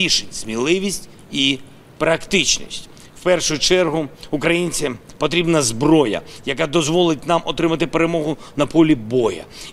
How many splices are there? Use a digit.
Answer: 0